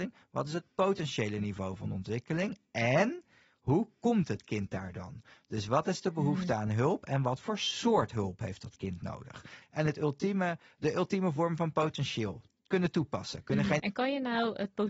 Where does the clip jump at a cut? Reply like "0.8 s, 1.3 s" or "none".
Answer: 9.6 s, 13.8 s